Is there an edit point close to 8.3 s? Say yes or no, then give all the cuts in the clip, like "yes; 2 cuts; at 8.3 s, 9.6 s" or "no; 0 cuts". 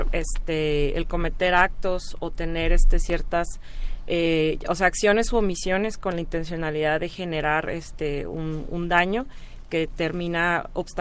no; 0 cuts